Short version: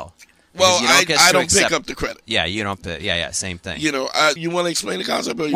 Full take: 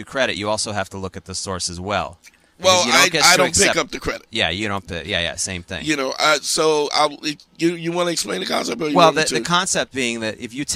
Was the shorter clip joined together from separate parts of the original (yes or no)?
yes